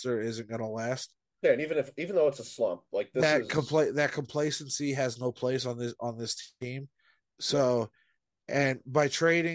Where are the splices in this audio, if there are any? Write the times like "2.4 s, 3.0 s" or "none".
none